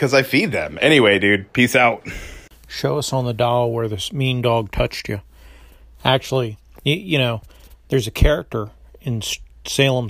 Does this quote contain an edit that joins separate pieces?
yes; 1 cut; at 2.5 s

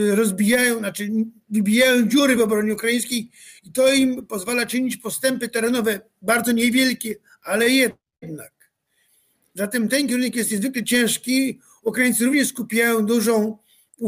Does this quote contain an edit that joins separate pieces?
no; 0 cuts

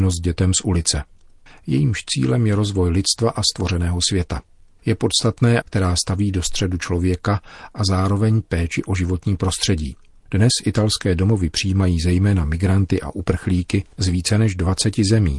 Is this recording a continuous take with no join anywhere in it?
no; 3 cuts; at 1.5 s, 5.6 s, 10.1 s

